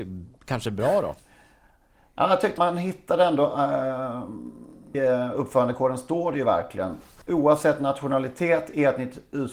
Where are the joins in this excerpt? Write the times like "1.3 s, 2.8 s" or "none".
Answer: 2.6 s, 4.9 s